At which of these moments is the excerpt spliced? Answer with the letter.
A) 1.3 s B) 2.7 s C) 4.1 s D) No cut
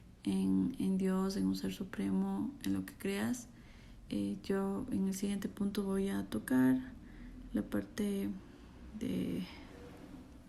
C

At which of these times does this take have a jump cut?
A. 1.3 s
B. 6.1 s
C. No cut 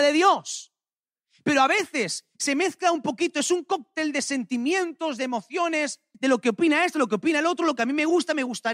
B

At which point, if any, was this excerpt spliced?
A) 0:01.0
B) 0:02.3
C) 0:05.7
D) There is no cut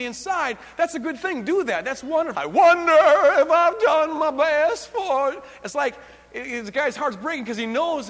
B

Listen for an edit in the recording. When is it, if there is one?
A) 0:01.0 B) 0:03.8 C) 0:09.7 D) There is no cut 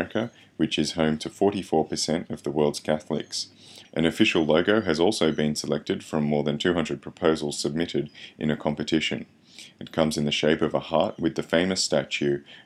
B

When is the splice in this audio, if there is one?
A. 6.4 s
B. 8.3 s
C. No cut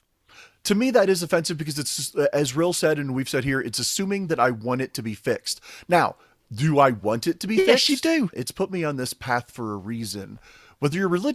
B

